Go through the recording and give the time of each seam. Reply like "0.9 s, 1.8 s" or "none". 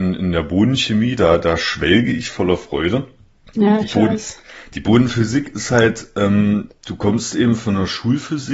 none